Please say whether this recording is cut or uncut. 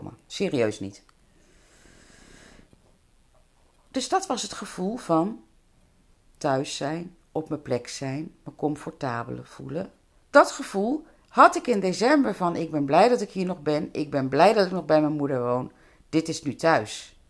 cut